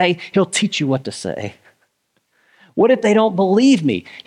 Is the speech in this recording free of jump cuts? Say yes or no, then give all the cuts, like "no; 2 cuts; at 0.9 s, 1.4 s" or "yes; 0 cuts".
yes; 0 cuts